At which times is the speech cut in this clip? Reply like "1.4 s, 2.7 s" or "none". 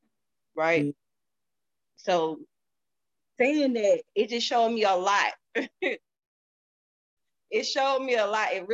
none